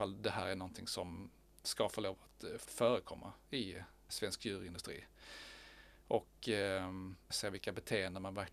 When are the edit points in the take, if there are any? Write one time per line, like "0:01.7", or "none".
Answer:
0:07.3